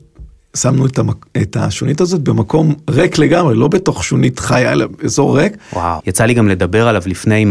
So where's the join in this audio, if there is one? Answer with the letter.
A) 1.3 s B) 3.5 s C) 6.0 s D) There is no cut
C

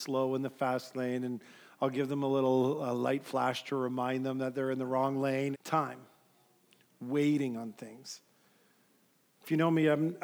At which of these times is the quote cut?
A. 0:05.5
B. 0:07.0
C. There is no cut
A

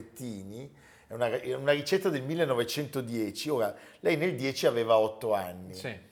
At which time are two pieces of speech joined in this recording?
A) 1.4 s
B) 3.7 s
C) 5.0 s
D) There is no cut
D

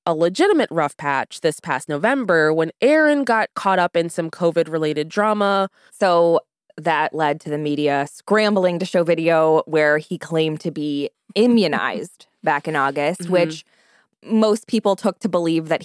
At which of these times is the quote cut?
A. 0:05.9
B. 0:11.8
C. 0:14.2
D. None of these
A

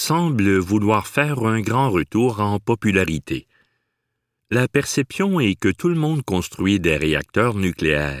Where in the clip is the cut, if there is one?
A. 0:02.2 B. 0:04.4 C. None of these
B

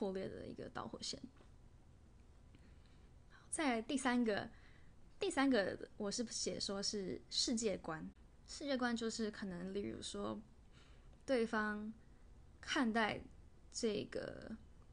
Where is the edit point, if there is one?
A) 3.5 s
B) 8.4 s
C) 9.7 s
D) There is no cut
D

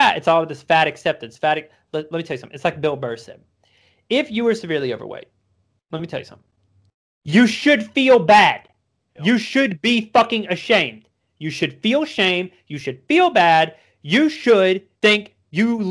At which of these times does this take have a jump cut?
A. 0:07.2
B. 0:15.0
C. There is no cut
B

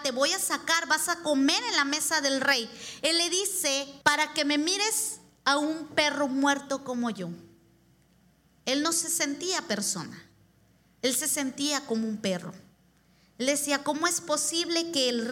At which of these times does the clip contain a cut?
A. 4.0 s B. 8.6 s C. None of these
A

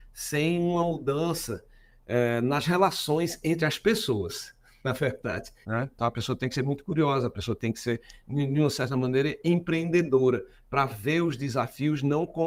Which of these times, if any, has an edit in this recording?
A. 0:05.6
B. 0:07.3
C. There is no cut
A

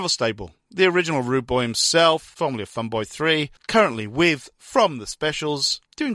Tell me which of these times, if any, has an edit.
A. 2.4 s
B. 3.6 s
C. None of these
A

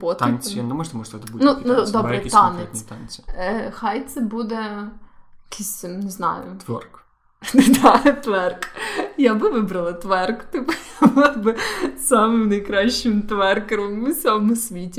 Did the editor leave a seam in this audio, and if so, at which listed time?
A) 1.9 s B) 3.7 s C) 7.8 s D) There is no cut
D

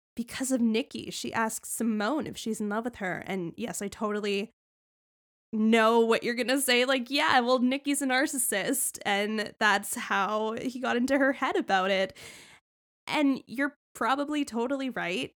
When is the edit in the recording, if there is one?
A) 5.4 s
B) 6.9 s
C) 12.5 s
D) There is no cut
D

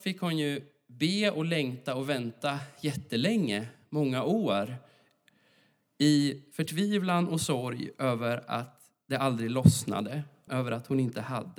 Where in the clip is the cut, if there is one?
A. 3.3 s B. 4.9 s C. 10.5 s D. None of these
C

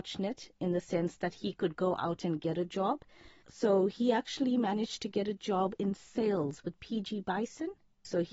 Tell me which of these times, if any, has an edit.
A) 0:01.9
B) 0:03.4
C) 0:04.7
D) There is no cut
D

